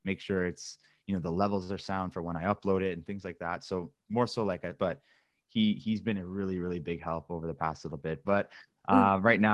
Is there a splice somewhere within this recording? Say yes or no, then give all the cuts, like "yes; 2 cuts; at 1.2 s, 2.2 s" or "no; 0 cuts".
yes; 2 cuts; at 4.8 s, 8.2 s